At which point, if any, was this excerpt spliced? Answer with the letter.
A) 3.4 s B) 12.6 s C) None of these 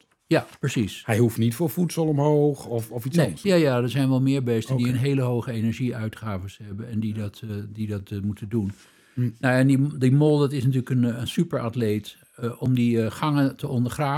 A